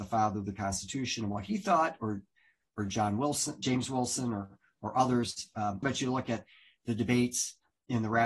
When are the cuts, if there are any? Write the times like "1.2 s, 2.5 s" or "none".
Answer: 5.8 s